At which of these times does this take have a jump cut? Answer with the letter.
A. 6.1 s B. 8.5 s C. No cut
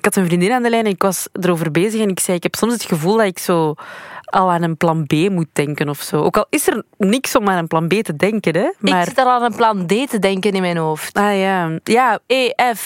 C